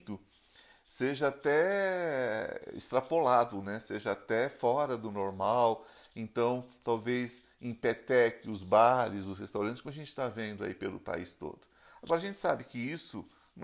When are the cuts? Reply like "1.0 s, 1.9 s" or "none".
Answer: none